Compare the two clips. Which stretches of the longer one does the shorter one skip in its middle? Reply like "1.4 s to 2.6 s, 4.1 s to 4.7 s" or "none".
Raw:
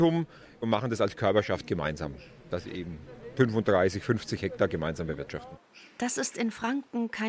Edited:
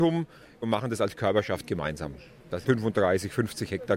2.6 s to 3.3 s